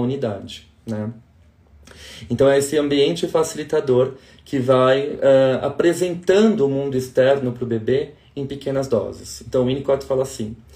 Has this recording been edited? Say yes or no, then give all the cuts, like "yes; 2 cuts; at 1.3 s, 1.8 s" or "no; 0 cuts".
no; 0 cuts